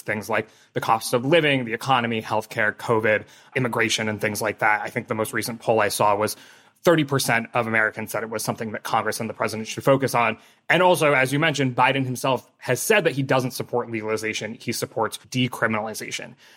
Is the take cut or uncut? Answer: uncut